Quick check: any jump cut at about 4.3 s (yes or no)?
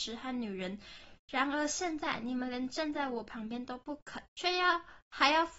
yes